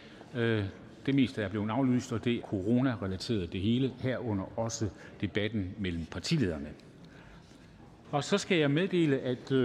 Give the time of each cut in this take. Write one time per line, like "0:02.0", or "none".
0:02.4
0:08.0